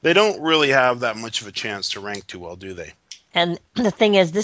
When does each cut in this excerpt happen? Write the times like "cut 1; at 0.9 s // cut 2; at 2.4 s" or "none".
cut 1; at 3.3 s